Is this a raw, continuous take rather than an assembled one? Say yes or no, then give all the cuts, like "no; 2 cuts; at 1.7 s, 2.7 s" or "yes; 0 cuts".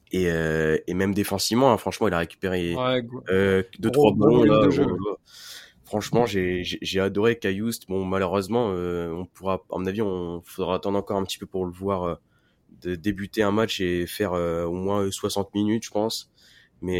yes; 0 cuts